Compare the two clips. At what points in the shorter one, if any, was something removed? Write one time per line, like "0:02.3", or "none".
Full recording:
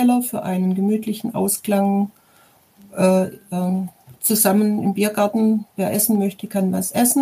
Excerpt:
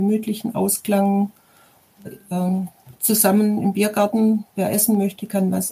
0:02.0